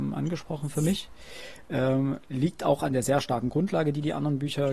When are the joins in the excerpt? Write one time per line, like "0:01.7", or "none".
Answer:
none